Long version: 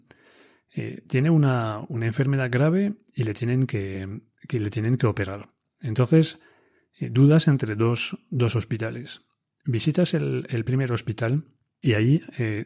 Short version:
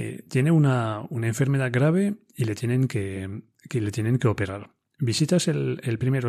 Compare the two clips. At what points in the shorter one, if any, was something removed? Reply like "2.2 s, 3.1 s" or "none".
4.9 s